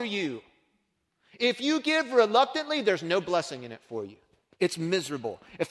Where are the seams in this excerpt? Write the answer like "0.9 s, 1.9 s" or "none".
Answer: none